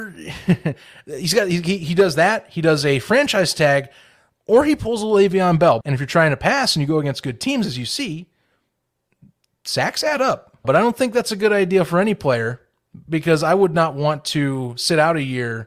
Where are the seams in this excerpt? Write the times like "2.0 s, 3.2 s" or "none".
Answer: 5.8 s, 10.6 s